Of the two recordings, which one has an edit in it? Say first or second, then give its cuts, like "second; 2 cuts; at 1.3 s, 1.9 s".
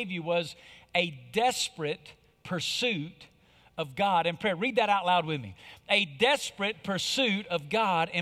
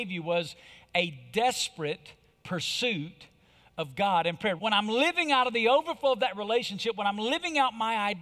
second; 1 cut; at 4.6 s